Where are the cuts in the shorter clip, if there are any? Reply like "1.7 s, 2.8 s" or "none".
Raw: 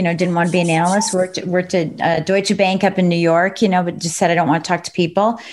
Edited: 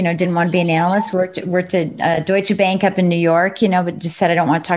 none